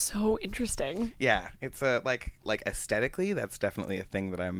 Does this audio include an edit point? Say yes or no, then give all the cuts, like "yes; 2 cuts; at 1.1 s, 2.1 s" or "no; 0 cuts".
yes; 1 cut; at 2.4 s